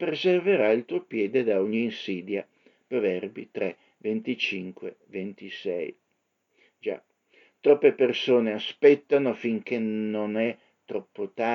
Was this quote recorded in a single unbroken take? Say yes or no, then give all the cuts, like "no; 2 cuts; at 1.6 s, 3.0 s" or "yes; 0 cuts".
yes; 0 cuts